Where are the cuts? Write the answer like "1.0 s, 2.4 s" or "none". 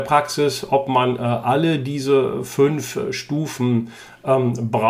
none